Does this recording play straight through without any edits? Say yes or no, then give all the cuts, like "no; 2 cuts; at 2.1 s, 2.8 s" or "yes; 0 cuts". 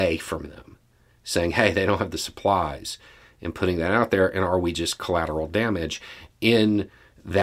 yes; 0 cuts